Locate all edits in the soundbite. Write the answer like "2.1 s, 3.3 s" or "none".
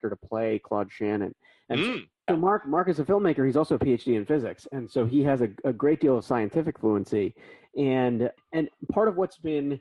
2.3 s, 8.4 s